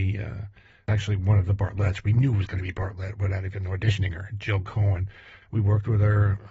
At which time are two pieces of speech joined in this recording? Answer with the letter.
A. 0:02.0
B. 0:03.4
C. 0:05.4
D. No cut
C